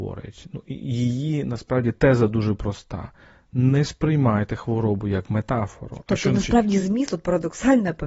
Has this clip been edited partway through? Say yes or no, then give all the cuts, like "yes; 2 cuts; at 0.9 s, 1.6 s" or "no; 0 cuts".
no; 0 cuts